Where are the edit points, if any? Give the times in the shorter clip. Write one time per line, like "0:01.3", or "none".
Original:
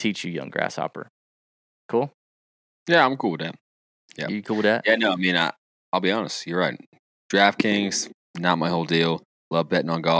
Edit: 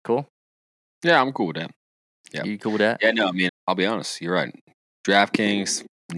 0:03.5